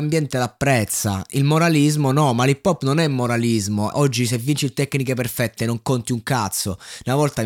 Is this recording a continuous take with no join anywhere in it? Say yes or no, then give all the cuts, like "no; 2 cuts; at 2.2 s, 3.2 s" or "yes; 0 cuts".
no; 1 cut; at 3.9 s